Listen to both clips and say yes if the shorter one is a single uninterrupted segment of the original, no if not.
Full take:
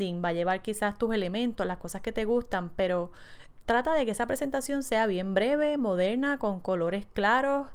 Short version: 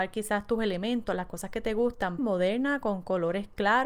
no